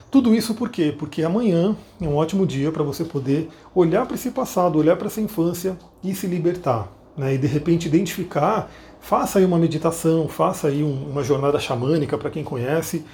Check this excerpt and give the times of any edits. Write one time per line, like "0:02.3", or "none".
none